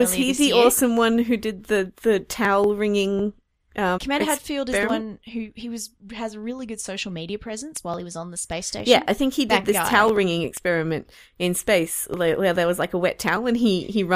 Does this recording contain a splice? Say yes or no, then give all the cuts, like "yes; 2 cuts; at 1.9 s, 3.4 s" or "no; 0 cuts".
yes; 1 cut; at 4.0 s